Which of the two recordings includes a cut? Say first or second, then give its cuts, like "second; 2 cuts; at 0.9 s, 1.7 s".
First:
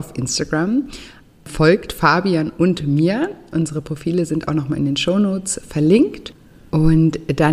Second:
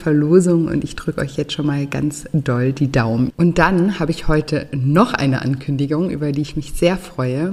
second; 1 cut; at 3.3 s